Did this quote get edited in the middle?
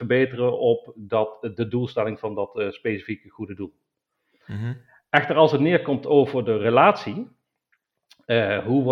no; 0 cuts

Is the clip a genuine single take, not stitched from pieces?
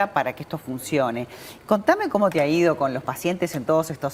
yes; 0 cuts

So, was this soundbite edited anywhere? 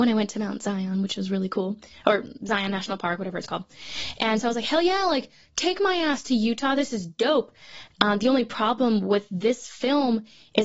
no; 0 cuts

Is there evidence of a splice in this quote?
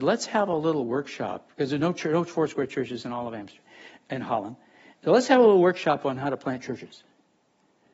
no; 0 cuts

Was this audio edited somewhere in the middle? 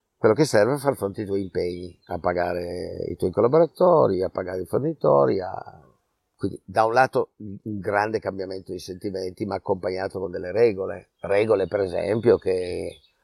no; 0 cuts

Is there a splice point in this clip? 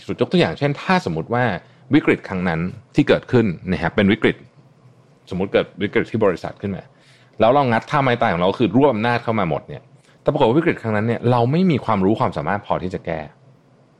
no; 0 cuts

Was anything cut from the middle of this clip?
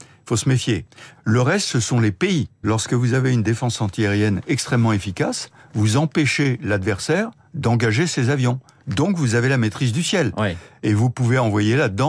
yes; 2 cuts; at 1.2 s, 2.6 s

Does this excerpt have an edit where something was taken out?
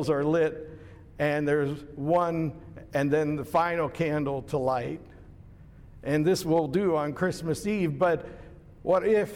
no; 0 cuts

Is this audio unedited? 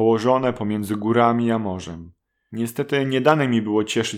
no; 1 cut; at 2.5 s

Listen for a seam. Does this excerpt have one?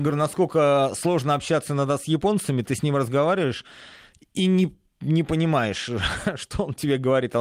no; 0 cuts

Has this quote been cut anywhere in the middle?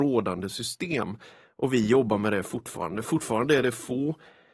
no; 0 cuts

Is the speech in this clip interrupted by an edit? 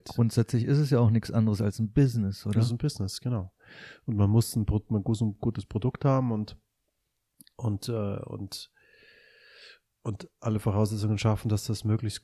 no; 0 cuts

